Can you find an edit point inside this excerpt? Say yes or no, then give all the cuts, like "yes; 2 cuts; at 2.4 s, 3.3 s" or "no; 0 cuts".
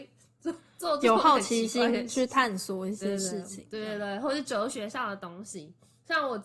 no; 0 cuts